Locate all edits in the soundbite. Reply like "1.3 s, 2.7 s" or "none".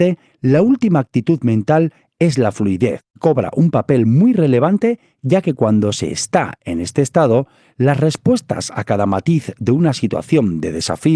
3.1 s

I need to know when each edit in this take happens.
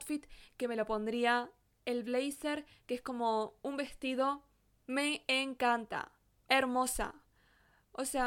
none

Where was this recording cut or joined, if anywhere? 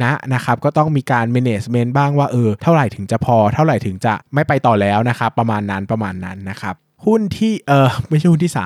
none

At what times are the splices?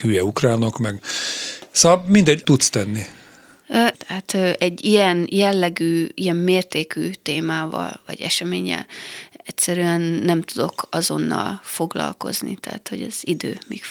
2.4 s, 3.9 s

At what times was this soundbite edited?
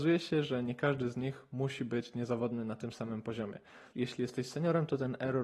3.9 s

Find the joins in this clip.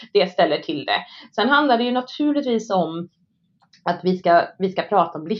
none

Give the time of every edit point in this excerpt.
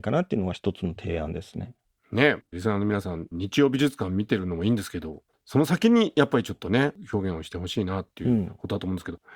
none

